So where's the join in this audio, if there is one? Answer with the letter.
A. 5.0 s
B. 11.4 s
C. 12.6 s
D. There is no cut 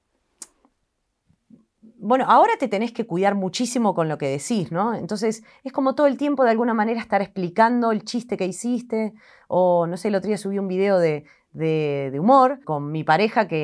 C